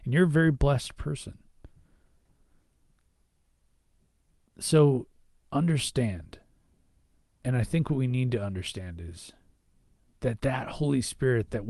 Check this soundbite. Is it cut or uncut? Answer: uncut